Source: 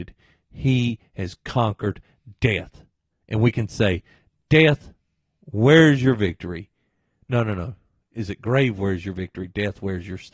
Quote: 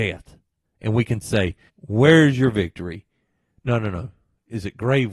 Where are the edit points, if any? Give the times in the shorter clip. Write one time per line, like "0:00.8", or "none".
0:01.7